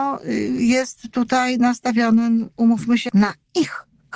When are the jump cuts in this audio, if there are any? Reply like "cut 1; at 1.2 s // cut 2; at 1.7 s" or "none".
cut 1; at 3.1 s

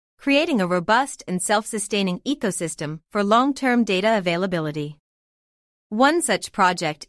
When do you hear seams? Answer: cut 1; at 5.7 s

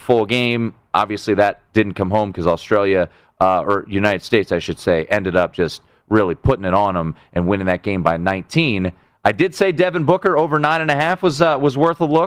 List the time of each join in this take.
none

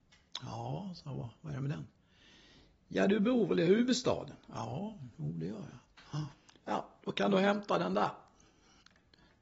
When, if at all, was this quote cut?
none

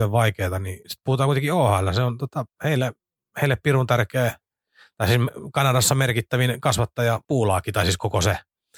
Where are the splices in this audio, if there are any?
none

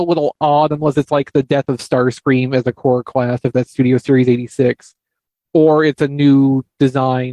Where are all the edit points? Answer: none

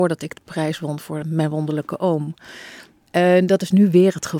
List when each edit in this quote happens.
cut 1; at 1.2 s

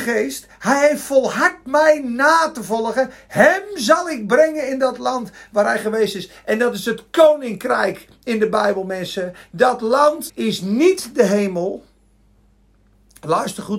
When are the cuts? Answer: cut 1; at 10.3 s

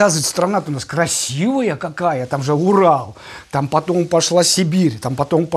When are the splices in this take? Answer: none

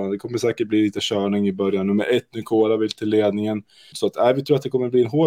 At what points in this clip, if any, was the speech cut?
cut 1; at 3.9 s

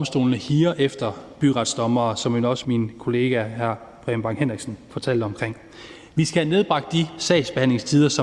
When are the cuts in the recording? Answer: cut 1; at 2.6 s

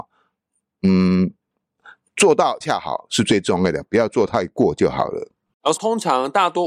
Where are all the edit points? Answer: cut 1; at 2.6 s // cut 2; at 5.8 s

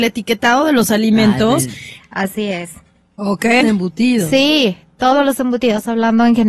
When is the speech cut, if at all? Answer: cut 1; at 2.0 s // cut 2; at 3.6 s

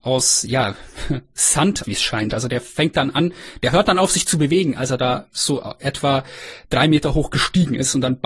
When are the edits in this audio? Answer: cut 1; at 1.8 s

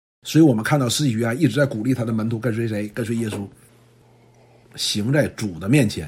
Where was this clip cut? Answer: cut 1; at 4.6 s

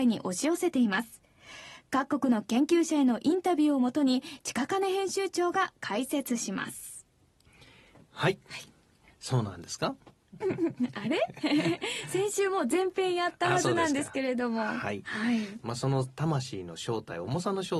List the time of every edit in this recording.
cut 1; at 10.4 s // cut 2; at 15.6 s

